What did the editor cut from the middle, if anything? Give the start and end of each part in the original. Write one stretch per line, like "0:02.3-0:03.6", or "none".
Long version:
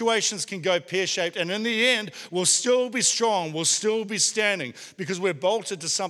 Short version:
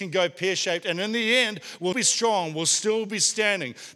0:02.4-0:02.9